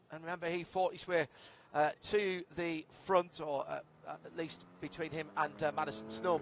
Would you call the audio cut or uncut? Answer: uncut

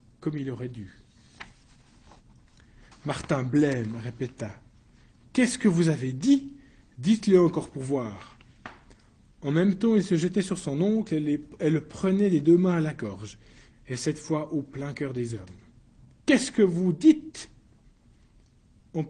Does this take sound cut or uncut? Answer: cut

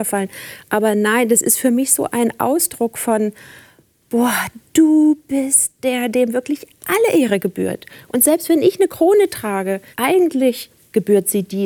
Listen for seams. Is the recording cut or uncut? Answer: cut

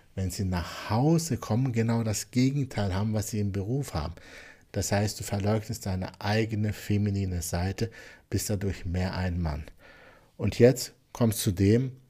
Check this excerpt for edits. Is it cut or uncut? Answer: cut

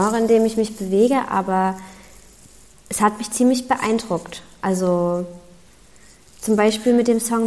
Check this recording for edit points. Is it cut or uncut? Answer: uncut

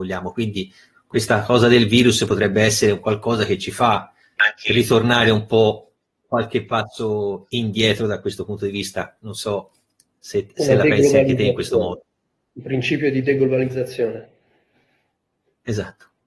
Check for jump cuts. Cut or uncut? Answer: cut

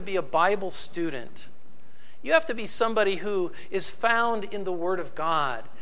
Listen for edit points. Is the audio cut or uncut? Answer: uncut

